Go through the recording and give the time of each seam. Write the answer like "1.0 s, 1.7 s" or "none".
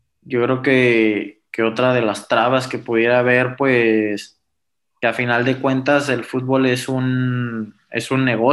none